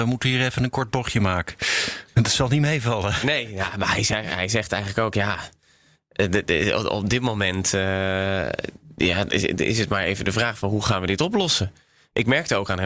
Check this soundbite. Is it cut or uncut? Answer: uncut